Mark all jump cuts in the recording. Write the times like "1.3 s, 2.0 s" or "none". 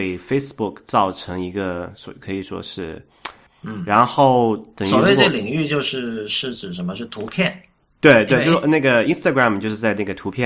3.5 s